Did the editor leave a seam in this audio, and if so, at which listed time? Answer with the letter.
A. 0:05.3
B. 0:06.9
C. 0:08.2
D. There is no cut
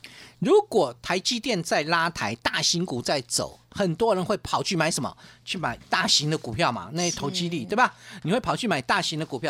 D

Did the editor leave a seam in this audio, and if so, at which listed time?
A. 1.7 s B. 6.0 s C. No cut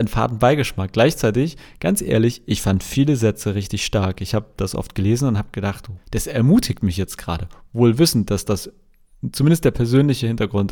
B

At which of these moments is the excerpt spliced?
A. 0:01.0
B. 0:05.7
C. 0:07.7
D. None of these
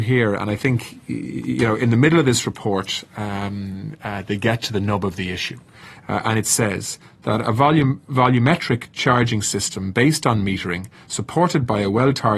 D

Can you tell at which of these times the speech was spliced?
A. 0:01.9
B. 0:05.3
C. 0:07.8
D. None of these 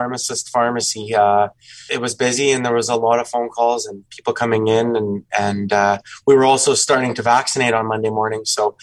A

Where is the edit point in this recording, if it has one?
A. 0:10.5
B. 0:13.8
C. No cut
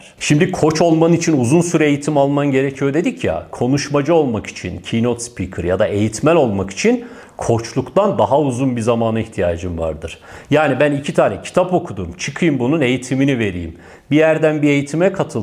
C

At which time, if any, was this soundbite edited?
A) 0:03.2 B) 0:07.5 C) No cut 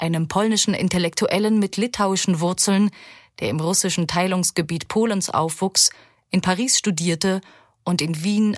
C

